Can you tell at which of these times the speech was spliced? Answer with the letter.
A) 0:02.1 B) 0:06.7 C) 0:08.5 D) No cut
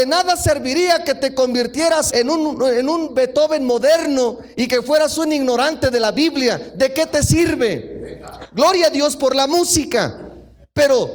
A